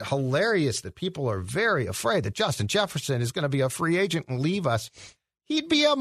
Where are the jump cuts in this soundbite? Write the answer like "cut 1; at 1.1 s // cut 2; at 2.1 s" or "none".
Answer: none